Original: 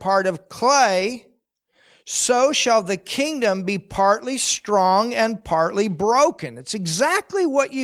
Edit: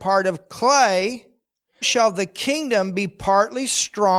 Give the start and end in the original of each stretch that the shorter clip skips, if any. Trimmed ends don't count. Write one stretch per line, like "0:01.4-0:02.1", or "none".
0:01.8-0:02.5